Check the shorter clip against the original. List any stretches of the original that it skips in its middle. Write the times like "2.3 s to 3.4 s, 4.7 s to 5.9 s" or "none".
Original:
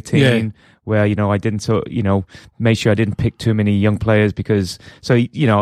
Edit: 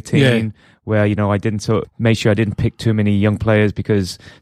1.8 s to 2.4 s